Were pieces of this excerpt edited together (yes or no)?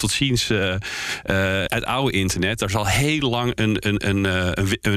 yes